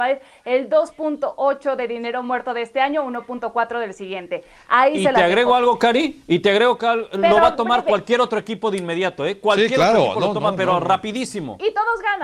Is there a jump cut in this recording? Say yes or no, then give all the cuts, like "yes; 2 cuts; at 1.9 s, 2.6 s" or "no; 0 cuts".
no; 0 cuts